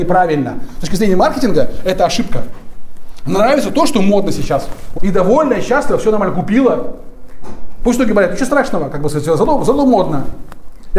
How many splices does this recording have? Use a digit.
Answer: 1